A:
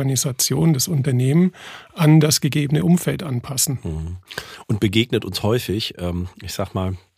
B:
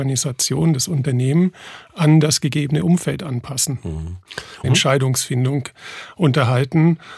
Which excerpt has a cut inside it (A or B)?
B